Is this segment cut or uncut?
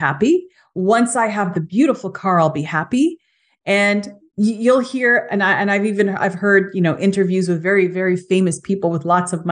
uncut